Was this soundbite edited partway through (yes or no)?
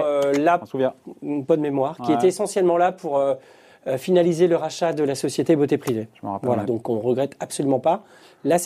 yes